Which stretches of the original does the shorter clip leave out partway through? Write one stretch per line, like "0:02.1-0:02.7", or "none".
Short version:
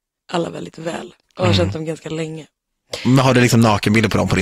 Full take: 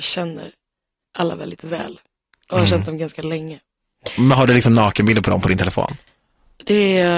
0:02.1-0:02.4